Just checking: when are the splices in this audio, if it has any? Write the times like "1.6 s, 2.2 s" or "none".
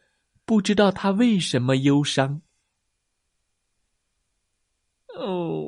none